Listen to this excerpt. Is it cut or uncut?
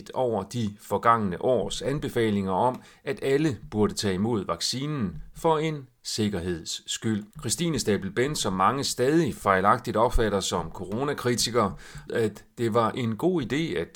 cut